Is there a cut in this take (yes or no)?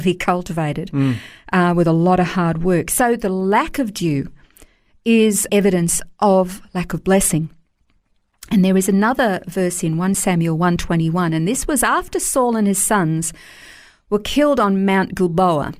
yes